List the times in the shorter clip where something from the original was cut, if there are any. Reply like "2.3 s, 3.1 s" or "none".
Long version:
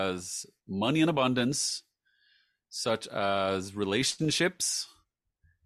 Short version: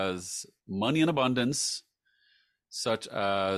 none